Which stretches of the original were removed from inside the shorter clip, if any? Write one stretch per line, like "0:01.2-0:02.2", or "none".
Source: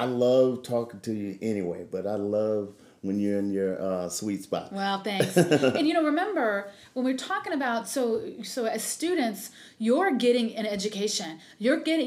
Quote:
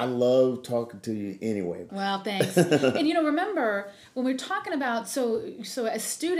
0:01.9-0:04.7